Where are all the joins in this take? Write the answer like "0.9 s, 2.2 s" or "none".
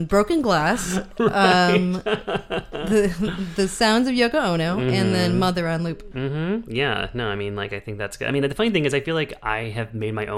none